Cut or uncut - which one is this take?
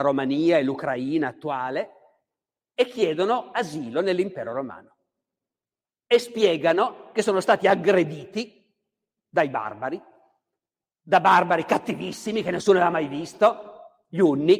uncut